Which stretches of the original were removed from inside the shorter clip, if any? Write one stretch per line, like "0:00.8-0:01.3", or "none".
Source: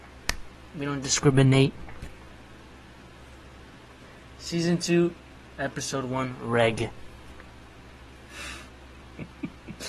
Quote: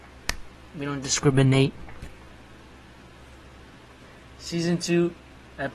none

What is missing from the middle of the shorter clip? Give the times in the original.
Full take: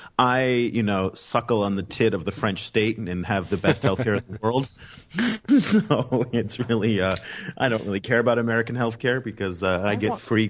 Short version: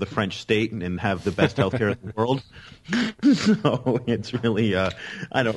none

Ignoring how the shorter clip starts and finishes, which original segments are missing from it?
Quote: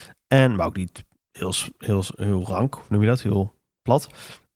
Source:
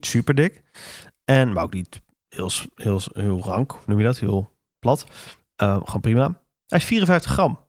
none

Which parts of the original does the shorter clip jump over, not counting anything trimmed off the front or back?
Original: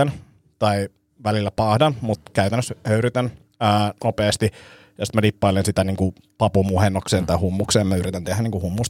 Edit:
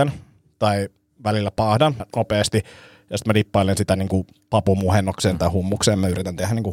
0:02.0-0:03.9

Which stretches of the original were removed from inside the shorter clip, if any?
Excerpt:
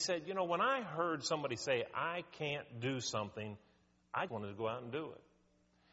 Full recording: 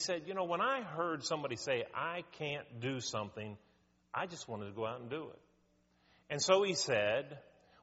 0:04.3-0:04.5

